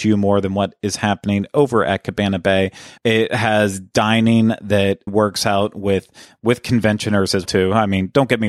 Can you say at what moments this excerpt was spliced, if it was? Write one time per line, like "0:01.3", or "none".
0:03.0
0:05.1
0:07.5